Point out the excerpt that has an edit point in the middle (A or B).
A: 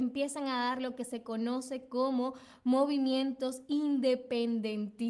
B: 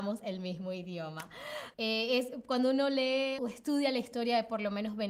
B